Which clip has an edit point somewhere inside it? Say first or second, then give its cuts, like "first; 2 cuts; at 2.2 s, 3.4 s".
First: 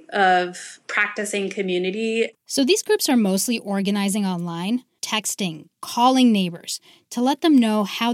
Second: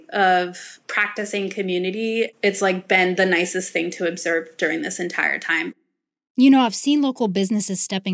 first; 2 cuts; at 2.3 s, 5.0 s